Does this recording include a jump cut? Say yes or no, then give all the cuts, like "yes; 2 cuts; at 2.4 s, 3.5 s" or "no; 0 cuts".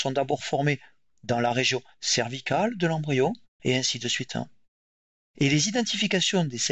yes; 1 cut; at 3.6 s